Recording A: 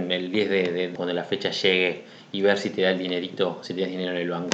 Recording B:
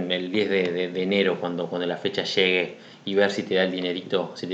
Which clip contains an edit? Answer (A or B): A